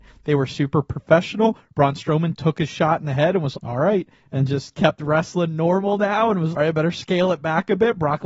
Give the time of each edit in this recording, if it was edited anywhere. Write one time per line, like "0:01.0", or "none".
0:03.5
0:06.5